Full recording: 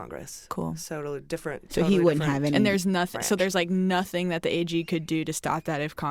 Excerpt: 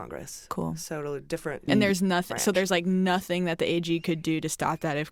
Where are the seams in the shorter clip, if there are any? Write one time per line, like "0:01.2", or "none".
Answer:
0:01.7